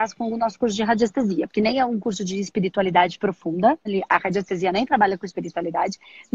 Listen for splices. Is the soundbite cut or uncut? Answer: cut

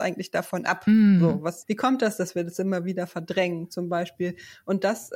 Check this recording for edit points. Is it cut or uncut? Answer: cut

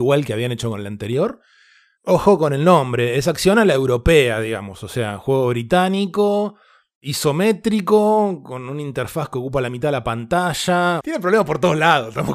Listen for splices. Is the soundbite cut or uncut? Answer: cut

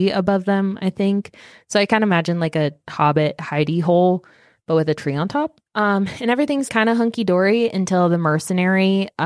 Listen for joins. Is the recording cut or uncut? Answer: cut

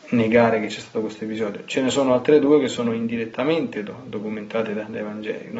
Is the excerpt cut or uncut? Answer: uncut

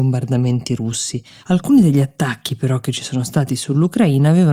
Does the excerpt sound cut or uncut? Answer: cut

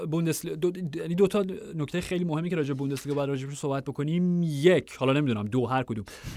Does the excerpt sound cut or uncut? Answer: uncut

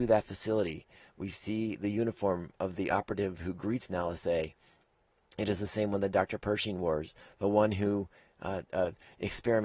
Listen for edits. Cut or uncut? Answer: uncut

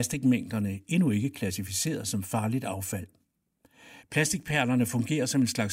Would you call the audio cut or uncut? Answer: cut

